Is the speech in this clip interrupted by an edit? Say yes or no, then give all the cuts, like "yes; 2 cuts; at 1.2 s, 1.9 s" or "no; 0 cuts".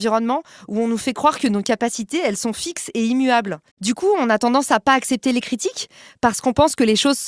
yes; 1 cut; at 3.7 s